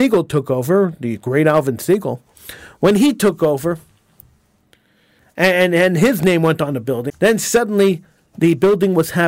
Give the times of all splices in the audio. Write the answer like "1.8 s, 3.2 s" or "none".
7.1 s